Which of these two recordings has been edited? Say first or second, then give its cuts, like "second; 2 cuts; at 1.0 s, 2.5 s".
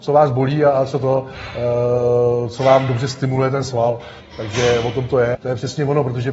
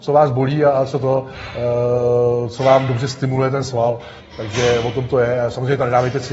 first; 1 cut; at 5.3 s